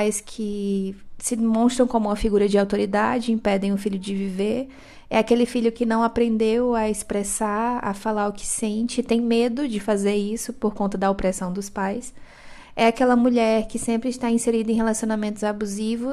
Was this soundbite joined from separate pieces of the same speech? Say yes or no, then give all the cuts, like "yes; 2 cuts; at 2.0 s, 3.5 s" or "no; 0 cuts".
no; 0 cuts